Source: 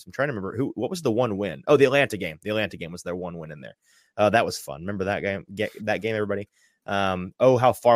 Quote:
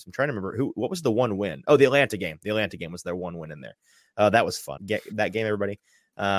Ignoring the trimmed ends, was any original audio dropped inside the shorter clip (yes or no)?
yes